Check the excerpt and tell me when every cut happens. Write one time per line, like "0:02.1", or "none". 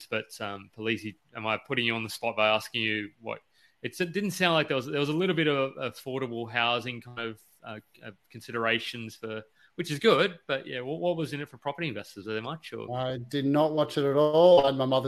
none